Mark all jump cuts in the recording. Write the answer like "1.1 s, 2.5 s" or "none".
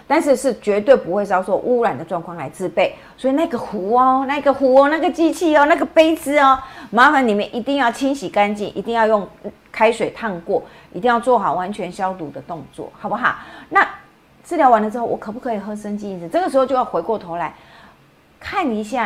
none